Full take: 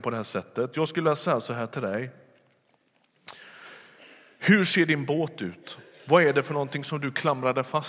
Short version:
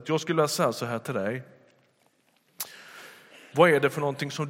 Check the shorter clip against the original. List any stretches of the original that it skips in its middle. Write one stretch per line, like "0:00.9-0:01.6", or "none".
0:04.2-0:06.0